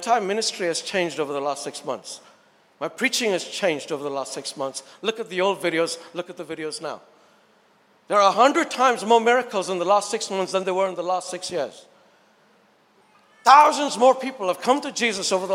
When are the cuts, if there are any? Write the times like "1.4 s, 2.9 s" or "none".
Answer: none